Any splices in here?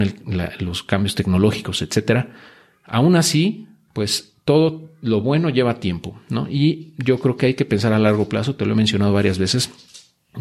no; 0 cuts

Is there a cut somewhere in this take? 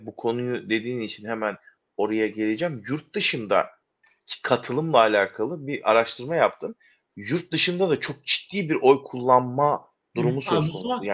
no; 0 cuts

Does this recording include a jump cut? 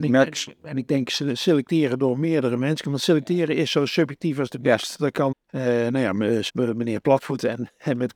yes; 2 cuts; at 5.3 s, 6.5 s

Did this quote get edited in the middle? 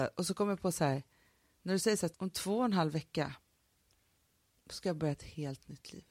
yes; 1 cut; at 2.1 s

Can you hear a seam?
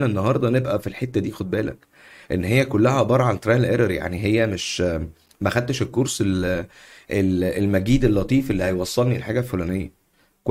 no; 0 cuts

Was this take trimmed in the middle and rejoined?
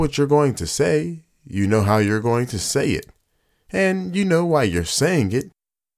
no; 0 cuts

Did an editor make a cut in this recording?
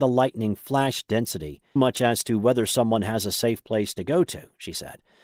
yes; 1 cut; at 1.8 s

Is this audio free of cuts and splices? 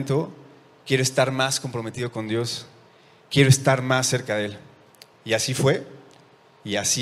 yes; 0 cuts

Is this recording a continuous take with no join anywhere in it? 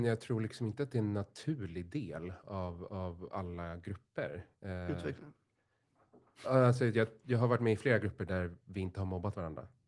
yes; 0 cuts

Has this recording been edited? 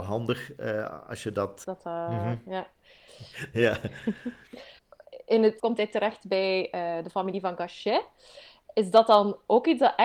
yes; 3 cuts; at 1.6 s, 3.1 s, 5.6 s

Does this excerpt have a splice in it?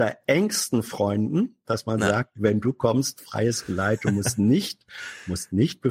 no; 0 cuts

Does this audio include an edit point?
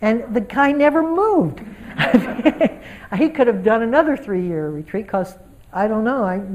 no; 0 cuts

